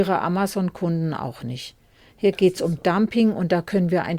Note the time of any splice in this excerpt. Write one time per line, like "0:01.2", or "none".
none

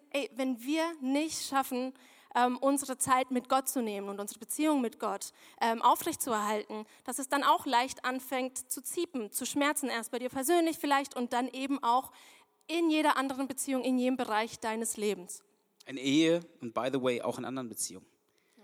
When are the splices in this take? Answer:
none

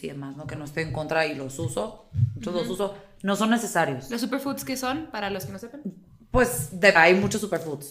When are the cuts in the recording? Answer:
0:06.9

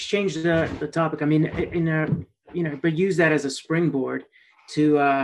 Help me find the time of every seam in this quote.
none

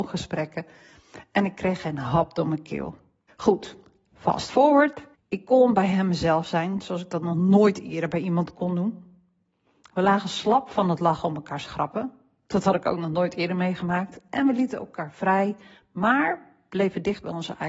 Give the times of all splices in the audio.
0:03.3
0:05.1

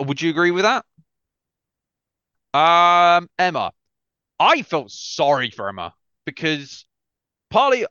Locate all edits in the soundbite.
0:02.3

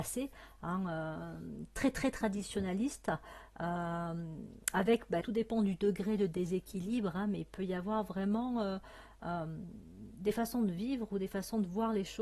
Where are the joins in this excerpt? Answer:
0:05.2

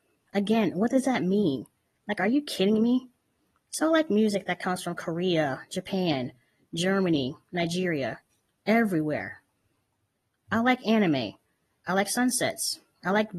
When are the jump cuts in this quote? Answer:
none

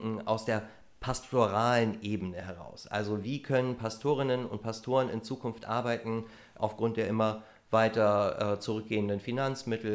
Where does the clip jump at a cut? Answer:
0:06.6

